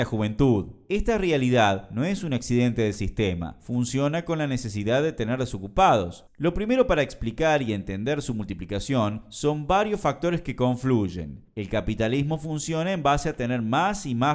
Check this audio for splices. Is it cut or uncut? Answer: cut